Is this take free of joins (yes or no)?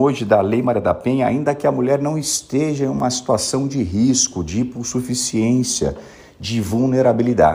yes